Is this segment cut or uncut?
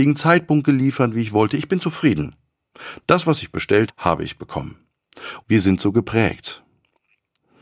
cut